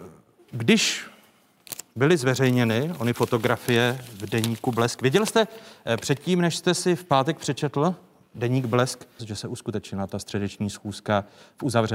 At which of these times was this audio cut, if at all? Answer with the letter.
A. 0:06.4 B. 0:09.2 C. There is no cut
B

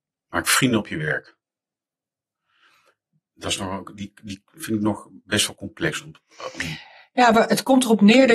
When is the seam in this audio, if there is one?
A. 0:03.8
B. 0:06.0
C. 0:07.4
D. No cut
D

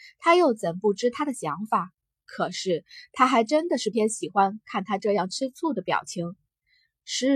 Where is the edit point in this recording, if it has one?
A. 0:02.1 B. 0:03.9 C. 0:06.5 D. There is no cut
B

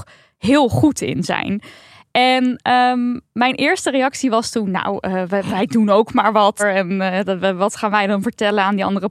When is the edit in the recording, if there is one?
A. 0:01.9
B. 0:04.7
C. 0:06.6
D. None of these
C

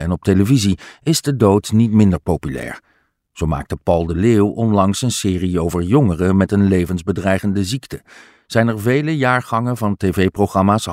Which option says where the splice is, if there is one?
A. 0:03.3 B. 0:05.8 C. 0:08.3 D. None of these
D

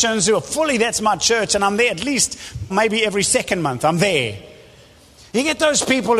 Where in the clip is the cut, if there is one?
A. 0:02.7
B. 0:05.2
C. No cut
A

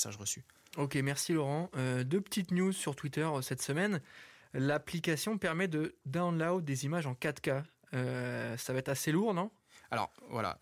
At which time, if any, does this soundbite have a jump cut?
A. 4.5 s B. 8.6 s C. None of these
C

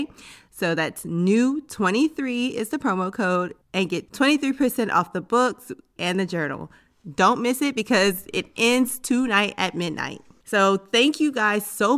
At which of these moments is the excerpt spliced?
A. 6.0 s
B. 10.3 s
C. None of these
A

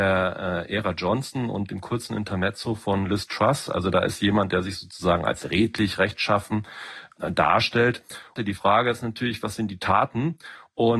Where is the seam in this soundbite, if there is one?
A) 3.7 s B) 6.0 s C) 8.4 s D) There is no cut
C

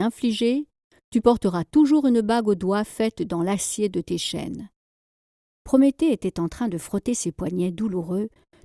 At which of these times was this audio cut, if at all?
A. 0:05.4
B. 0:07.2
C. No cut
A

